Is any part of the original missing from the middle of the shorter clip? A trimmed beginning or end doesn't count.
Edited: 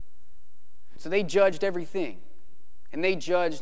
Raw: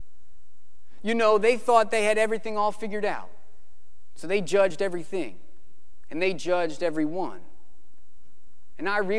yes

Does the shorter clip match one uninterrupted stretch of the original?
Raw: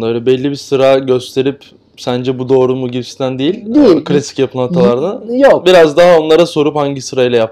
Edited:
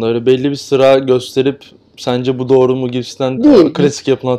no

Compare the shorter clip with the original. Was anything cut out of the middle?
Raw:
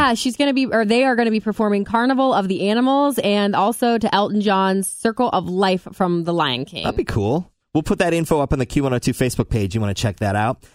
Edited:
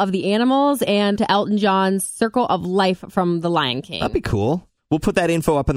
yes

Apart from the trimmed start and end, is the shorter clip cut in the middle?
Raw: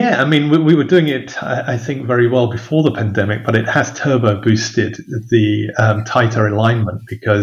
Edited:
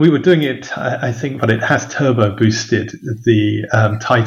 yes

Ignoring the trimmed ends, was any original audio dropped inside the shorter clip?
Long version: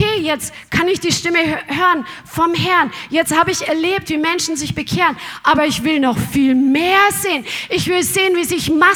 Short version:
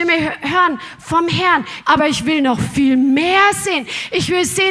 yes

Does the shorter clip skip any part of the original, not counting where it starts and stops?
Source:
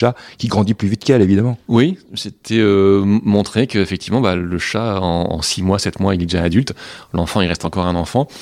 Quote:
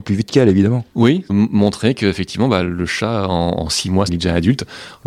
yes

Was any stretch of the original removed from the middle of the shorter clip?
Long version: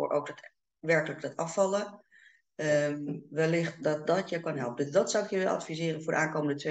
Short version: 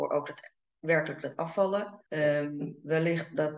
yes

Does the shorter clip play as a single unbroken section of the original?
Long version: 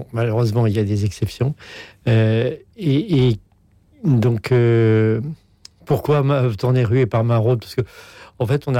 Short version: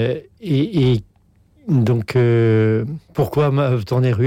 no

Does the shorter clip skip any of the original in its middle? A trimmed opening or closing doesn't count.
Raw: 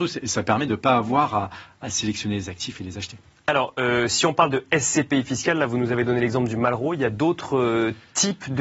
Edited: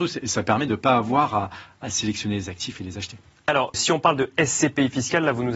yes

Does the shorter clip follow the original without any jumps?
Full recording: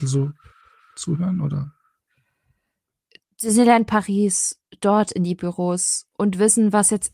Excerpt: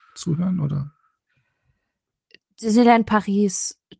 yes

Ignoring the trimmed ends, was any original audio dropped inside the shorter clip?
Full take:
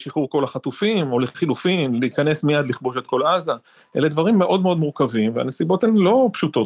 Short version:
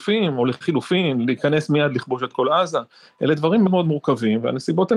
yes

